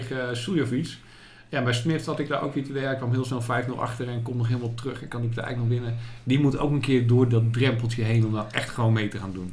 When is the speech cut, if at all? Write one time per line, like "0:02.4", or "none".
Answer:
none